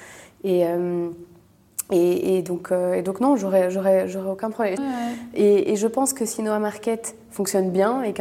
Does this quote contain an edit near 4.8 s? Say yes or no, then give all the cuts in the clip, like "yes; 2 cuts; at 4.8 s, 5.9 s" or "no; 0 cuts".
yes; 1 cut; at 4.8 s